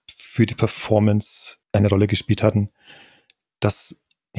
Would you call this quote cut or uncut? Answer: cut